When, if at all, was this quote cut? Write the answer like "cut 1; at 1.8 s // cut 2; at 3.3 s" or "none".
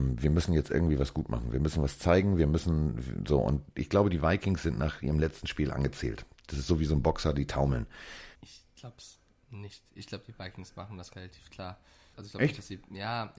cut 1; at 8.4 s // cut 2; at 12.1 s